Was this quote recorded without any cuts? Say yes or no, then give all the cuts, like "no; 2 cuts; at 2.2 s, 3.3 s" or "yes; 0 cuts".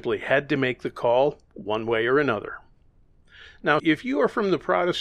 no; 1 cut; at 3.8 s